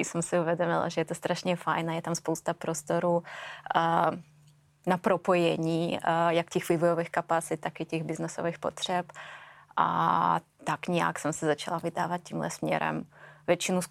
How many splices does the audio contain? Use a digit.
0